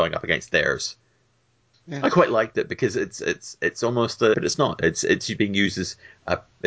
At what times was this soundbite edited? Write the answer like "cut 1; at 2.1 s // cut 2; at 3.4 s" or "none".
cut 1; at 1.7 s // cut 2; at 4.3 s